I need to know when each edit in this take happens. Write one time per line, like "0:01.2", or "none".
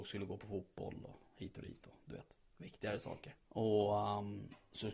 0:03.4